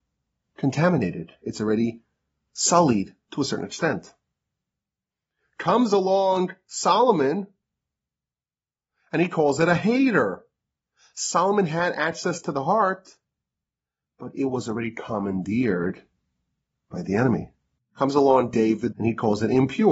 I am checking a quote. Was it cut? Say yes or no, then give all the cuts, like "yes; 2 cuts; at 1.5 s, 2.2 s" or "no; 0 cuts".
yes; 2 cuts; at 17.8 s, 18.9 s